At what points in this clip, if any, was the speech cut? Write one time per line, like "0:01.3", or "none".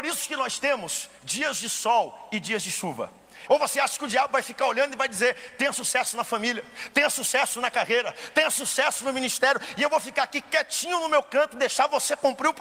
0:03.5

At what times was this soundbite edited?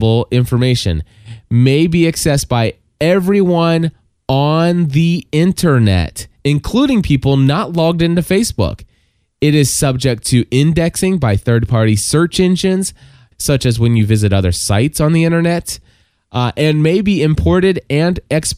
0:13.3

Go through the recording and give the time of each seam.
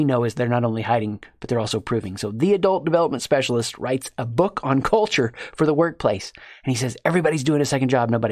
none

